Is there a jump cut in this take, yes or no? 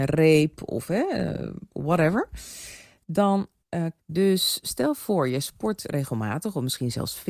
yes